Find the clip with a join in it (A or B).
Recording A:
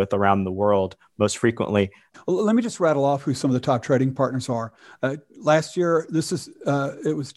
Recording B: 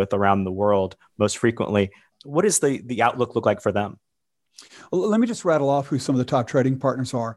A